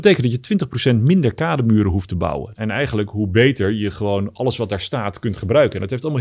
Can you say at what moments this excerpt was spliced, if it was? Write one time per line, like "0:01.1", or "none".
0:02.5